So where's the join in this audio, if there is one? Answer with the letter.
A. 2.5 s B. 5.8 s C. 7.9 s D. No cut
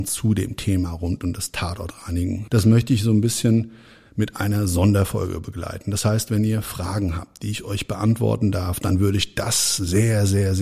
A